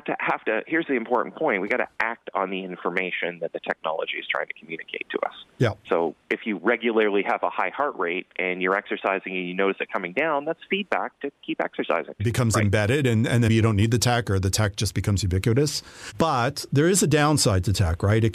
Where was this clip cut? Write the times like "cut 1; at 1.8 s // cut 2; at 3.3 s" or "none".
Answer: cut 1; at 12.2 s // cut 2; at 13.5 s

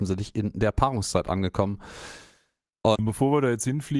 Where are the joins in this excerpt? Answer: cut 1; at 2.9 s

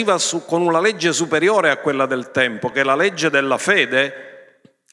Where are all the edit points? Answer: none

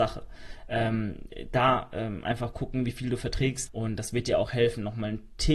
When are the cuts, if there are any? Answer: cut 1; at 3.7 s

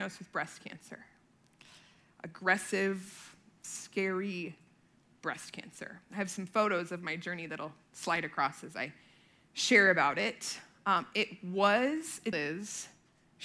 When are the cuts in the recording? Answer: cut 1; at 12.3 s

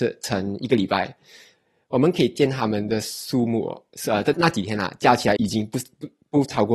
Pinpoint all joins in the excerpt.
cut 1; at 4.3 s // cut 2; at 5.4 s

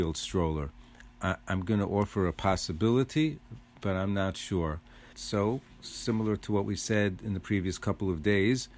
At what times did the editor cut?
cut 1; at 1.1 s // cut 2; at 5.1 s

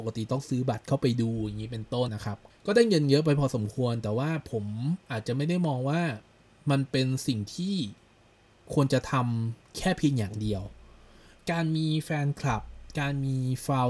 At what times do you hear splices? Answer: cut 1; at 2.1 s

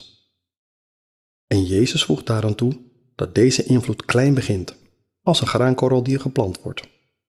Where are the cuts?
none

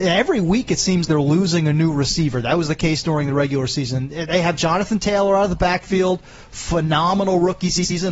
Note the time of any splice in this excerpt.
cut 1; at 1.0 s

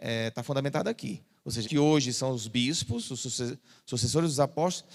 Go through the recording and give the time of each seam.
cut 1; at 1.6 s

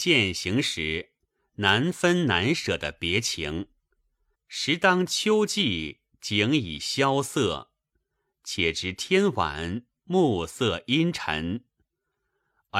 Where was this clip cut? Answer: cut 1; at 4.3 s

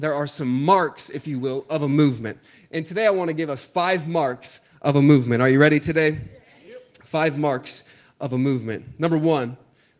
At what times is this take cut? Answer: none

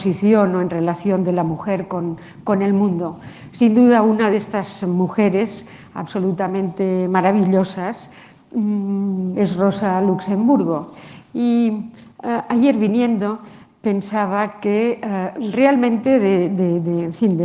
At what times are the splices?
cut 1; at 9.3 s

